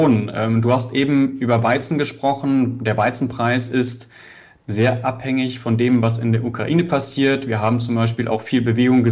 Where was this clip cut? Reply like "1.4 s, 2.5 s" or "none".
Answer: none